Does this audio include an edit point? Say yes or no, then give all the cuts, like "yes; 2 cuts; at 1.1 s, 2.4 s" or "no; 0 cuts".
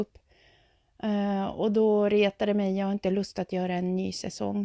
no; 0 cuts